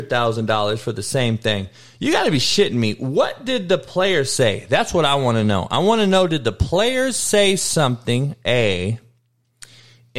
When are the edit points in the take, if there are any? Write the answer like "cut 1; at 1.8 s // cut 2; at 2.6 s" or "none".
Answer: none